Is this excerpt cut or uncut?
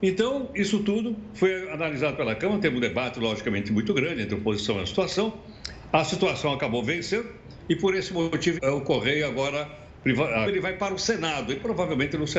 cut